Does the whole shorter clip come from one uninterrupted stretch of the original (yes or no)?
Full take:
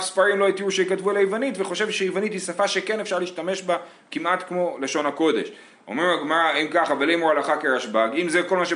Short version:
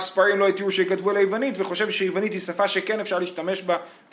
yes